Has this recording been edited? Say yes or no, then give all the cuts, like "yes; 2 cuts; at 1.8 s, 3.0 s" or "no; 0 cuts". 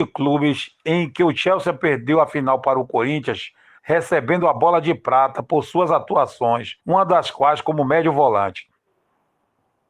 yes; 2 cuts; at 3.8 s, 6.8 s